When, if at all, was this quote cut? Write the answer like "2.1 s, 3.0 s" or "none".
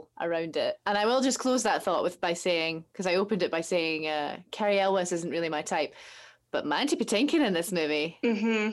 none